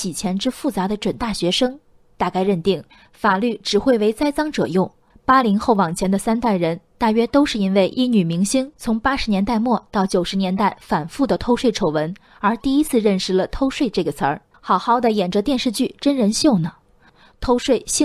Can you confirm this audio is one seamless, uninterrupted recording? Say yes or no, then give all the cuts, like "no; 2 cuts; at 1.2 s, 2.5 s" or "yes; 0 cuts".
no; 2 cuts; at 5.1 s, 14.5 s